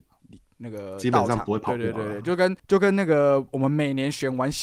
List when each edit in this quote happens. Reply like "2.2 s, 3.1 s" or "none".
2.6 s